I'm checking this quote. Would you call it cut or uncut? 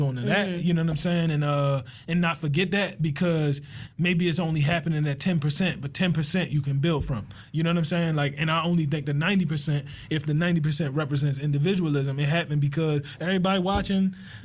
uncut